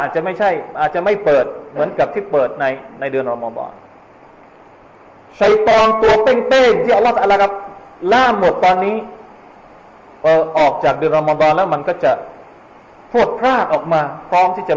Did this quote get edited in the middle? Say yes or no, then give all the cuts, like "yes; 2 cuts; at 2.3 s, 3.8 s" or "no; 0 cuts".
no; 0 cuts